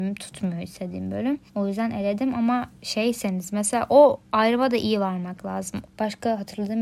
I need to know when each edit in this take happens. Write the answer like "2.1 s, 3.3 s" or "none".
1.5 s, 5.9 s